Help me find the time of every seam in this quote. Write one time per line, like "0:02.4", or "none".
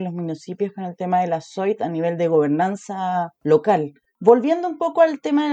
0:04.1